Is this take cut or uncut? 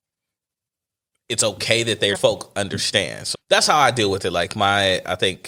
cut